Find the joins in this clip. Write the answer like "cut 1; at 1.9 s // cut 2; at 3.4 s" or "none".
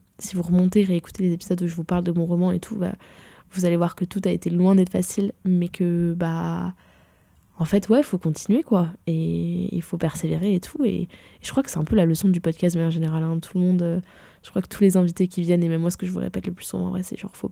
none